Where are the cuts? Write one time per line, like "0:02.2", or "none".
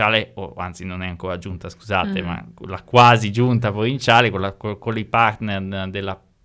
none